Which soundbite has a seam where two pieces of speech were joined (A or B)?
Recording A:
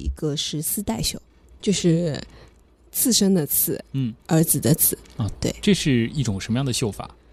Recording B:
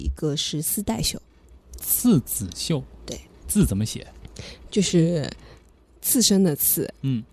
A